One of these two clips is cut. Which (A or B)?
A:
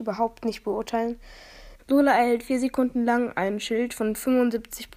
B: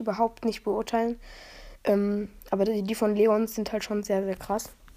A